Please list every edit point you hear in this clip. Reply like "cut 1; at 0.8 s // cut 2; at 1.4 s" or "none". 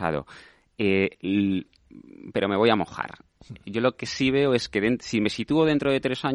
none

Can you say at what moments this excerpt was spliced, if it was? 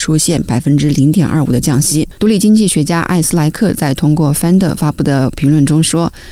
cut 1; at 2.2 s

